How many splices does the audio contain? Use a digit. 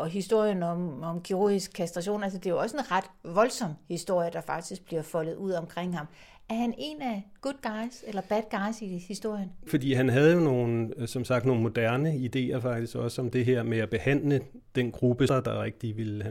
2